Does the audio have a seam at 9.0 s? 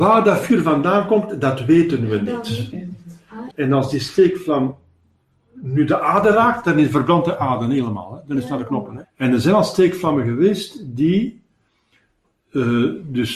yes; 2 cuts; at 3.5 s, 9.0 s

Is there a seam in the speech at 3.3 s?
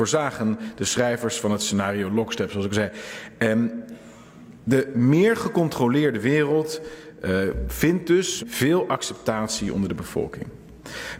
no; 1 cut; at 8.4 s

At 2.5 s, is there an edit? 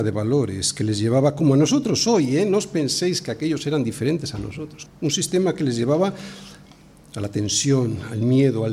no; 1 cut; at 4.9 s

